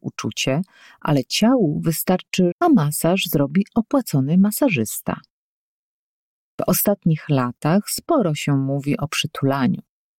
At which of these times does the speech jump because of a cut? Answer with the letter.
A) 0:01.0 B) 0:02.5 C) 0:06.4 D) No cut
B